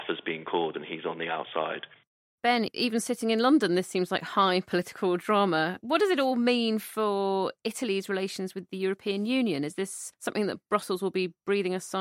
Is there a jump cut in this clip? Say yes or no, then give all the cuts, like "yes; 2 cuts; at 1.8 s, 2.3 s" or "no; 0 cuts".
no; 0 cuts